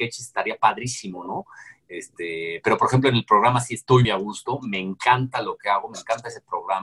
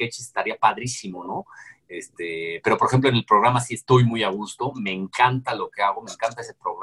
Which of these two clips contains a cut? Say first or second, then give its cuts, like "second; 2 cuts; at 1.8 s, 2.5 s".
first; 1 cut; at 4.0 s